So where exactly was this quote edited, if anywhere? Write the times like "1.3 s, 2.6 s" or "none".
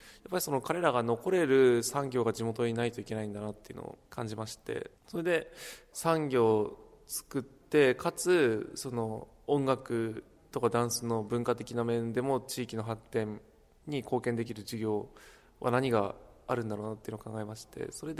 5.0 s